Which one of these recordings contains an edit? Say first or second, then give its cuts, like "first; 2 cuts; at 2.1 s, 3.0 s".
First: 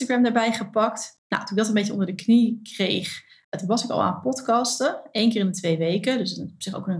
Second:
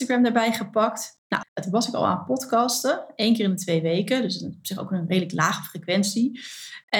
second; 1 cut; at 1.4 s